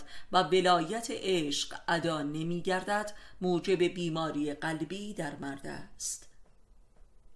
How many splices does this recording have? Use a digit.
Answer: 0